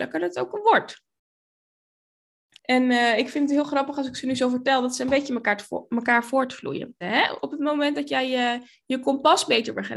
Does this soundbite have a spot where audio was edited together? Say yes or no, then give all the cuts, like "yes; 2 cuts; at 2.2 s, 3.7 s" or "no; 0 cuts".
yes; 2 cuts; at 2.6 s, 7.0 s